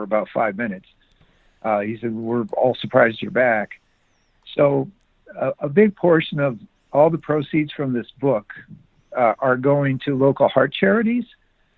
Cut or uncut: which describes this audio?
uncut